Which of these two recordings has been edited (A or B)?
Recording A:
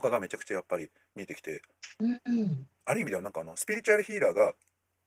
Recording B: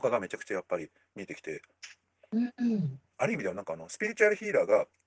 A